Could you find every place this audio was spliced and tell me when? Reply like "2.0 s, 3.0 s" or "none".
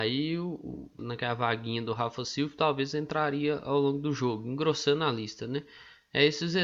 1.0 s